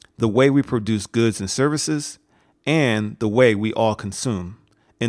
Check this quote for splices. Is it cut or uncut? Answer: uncut